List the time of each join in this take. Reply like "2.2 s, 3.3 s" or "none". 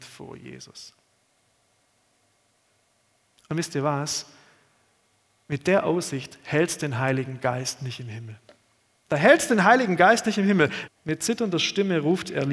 10.9 s